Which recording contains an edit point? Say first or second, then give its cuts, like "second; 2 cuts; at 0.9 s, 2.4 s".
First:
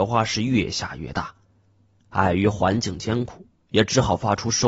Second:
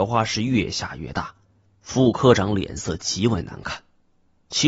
second; 1 cut; at 1.7 s